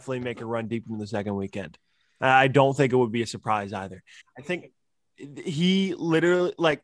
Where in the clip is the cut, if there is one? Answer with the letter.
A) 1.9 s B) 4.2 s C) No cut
B